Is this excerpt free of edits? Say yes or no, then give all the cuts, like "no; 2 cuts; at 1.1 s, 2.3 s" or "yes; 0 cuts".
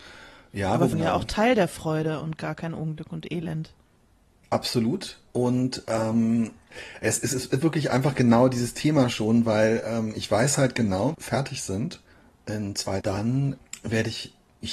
no; 3 cuts; at 0.9 s, 11.1 s, 13.0 s